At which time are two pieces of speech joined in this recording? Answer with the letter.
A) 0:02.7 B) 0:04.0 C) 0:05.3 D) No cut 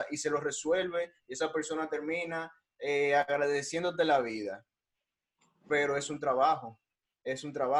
D